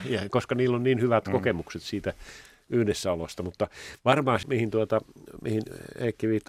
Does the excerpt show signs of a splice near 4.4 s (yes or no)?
yes